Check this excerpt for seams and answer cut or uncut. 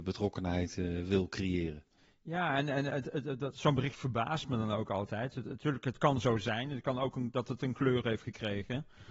uncut